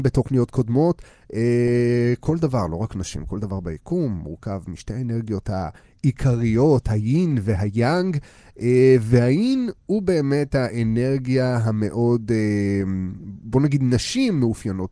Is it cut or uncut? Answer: uncut